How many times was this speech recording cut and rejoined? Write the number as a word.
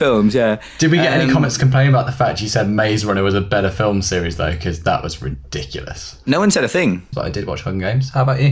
one